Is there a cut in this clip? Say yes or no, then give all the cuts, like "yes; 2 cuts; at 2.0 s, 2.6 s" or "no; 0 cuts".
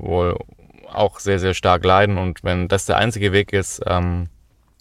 no; 0 cuts